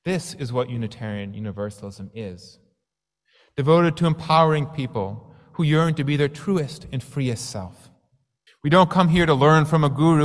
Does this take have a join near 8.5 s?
yes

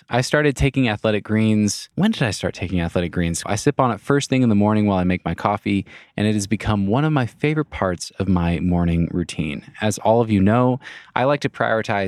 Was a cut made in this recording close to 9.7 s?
no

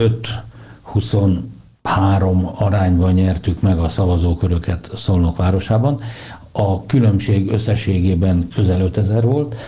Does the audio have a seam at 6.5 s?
no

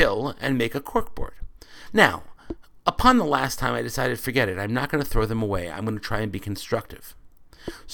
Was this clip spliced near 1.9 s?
yes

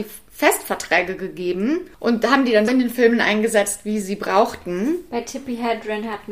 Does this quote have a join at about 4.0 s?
yes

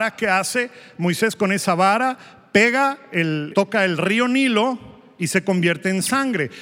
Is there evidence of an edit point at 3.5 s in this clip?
yes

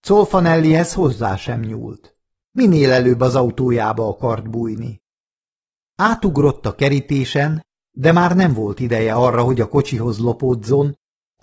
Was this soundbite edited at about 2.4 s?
yes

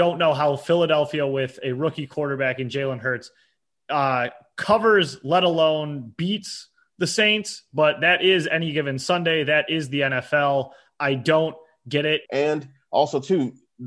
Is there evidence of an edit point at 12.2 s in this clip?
yes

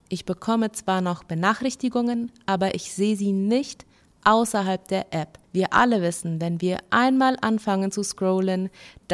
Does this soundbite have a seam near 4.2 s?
no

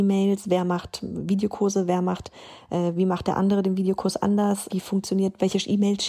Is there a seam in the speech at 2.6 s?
no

